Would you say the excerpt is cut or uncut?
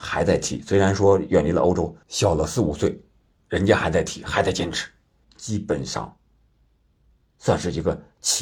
cut